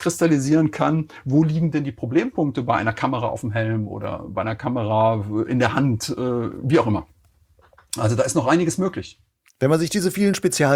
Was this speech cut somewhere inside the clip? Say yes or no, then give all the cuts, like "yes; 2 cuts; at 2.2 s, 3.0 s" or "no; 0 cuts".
no; 0 cuts